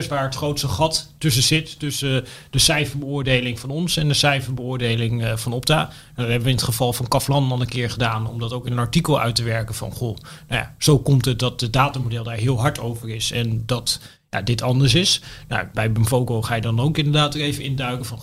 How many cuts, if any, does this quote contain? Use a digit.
0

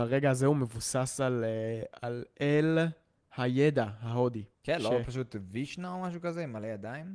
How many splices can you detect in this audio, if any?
1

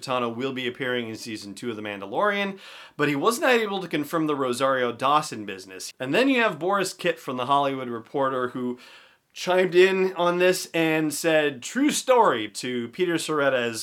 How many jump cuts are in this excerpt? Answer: 2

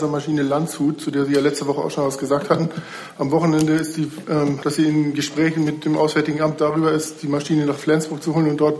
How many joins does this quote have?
1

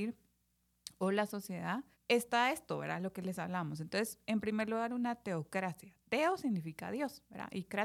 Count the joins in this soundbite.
1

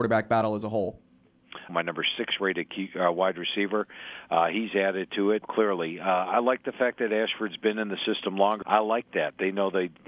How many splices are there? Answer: 3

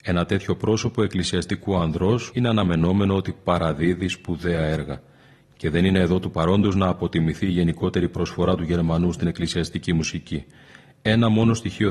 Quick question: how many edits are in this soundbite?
1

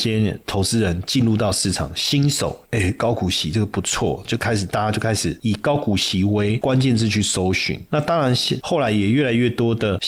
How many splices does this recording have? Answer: 1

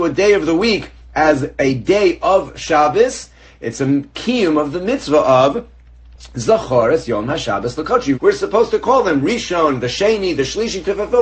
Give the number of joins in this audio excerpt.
1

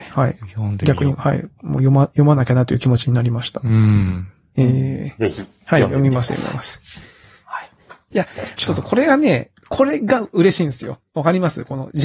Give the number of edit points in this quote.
1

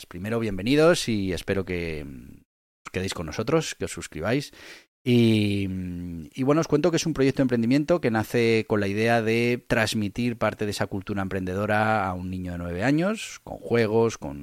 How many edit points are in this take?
0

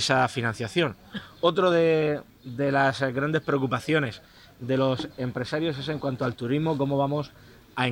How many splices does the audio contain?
0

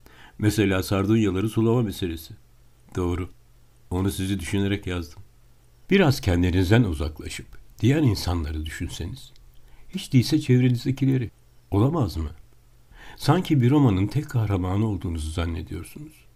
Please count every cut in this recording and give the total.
1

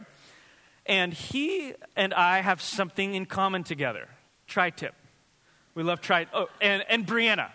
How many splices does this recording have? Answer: 0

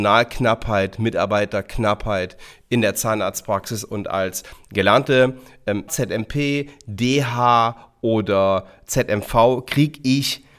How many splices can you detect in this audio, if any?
1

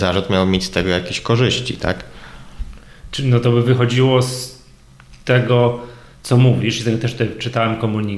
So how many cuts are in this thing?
0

